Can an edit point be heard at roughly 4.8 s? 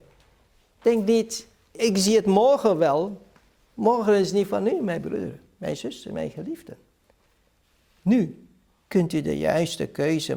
no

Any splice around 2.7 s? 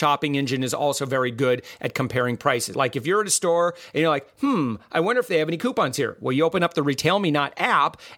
yes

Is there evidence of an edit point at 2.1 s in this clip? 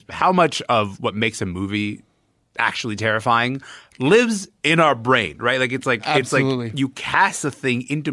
no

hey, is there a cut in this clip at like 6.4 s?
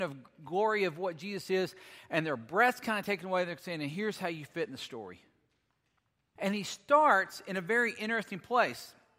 yes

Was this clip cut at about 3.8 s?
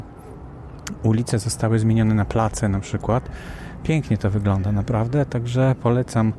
no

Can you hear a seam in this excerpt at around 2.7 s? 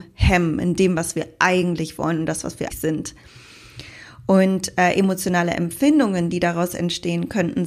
yes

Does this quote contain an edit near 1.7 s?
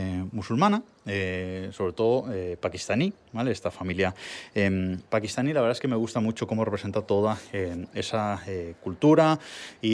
no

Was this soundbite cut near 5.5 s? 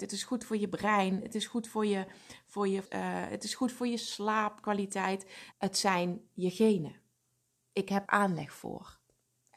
yes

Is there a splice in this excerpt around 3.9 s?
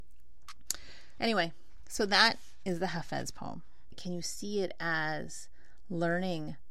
yes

